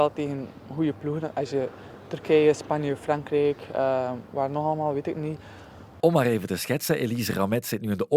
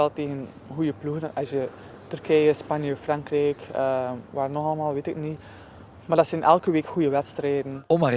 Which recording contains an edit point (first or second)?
first